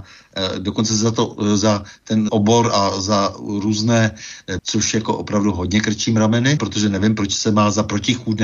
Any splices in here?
yes; 3 cuts; at 2.3 s, 4.6 s, 6.6 s

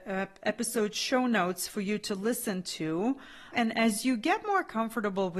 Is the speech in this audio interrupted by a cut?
yes; 1 cut; at 3.5 s

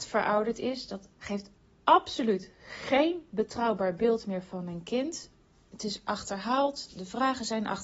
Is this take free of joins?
no; 1 cut; at 1.1 s

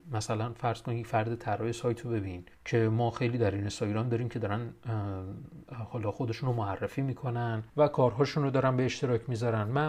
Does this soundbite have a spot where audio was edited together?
yes; 2 cuts; at 2.5 s, 7.7 s

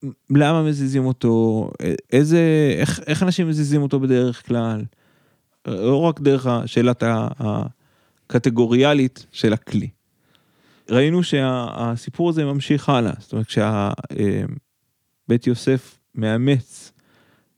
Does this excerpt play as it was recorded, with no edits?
yes; 0 cuts

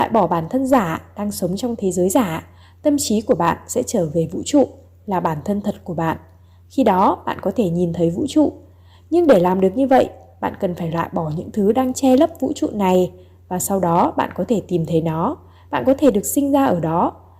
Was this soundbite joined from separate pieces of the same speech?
no; 0 cuts

